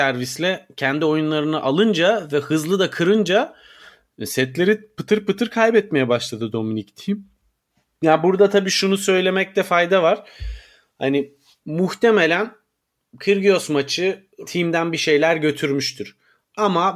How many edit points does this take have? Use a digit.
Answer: 1